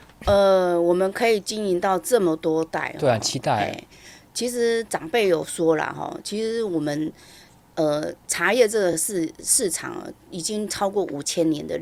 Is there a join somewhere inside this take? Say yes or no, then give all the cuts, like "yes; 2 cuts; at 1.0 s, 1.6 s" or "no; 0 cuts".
no; 0 cuts